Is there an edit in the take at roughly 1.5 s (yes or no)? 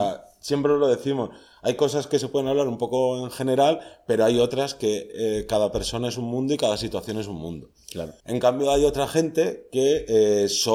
no